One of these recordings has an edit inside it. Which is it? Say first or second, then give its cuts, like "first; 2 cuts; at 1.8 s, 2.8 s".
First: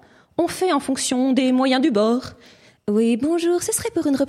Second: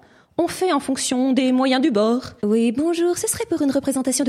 second; 1 cut; at 2.4 s